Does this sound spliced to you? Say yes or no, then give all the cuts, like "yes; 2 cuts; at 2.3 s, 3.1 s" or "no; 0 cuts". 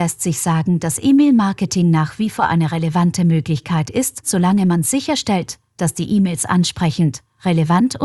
yes; 1 cut; at 4.2 s